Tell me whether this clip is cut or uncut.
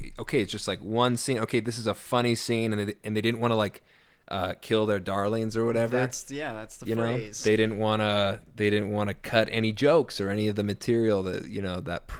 uncut